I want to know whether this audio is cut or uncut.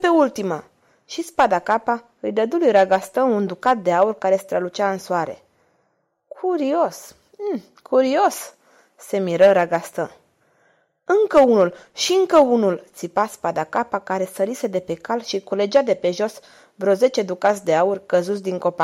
uncut